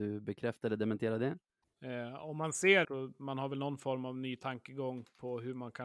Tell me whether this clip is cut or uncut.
cut